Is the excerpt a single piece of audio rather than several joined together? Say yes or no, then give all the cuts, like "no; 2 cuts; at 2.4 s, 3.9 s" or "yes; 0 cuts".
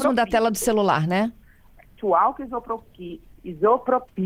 no; 1 cut; at 2.0 s